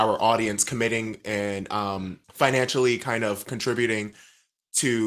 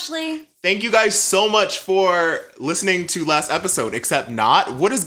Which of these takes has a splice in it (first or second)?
first